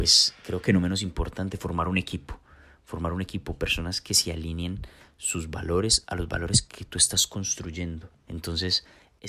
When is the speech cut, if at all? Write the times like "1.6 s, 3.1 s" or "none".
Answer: 8.2 s